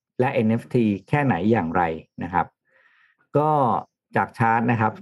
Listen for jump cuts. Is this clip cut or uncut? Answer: uncut